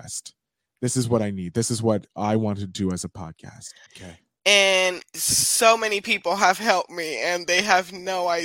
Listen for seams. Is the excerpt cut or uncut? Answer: cut